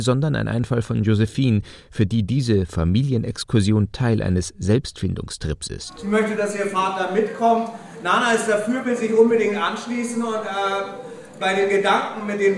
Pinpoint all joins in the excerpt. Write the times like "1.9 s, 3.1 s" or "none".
none